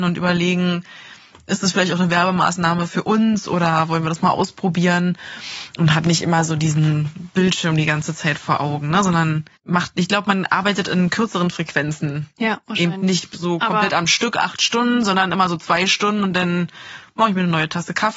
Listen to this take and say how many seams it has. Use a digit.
1